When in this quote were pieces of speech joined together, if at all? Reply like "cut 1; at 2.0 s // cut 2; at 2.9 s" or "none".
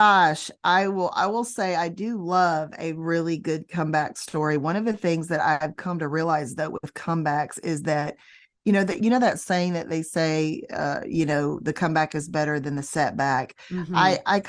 none